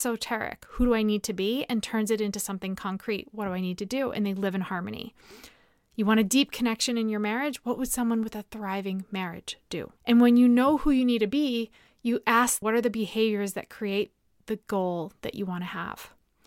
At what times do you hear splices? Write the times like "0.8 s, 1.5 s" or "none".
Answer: 10.0 s, 12.6 s

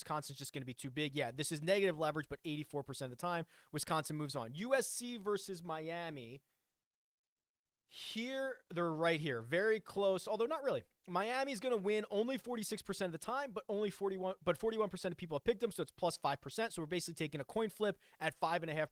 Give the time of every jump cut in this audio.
none

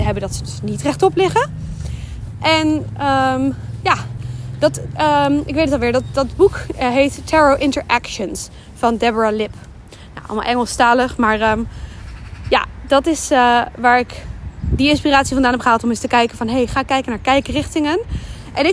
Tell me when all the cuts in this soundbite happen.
none

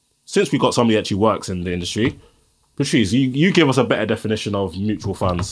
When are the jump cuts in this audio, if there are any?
none

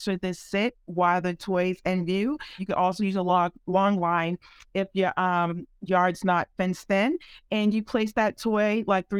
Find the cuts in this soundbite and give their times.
2.6 s

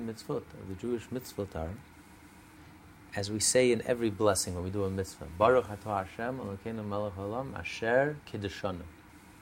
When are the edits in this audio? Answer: none

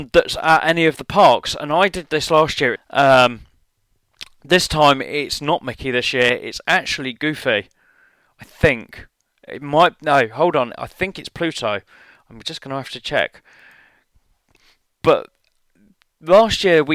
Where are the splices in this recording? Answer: 2.8 s

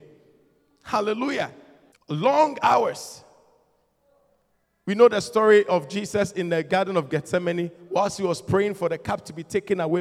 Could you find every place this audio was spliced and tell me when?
1.9 s

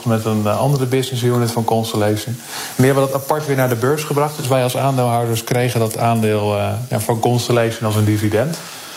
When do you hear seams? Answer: none

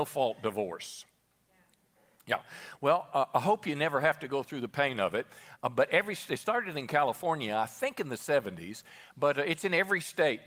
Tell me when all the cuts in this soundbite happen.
none

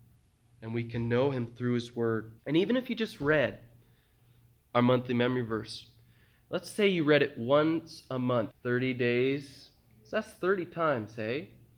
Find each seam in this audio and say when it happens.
2.4 s, 8.5 s

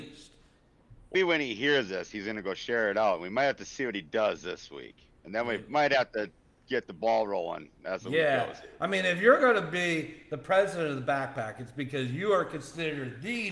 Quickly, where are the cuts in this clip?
1.1 s

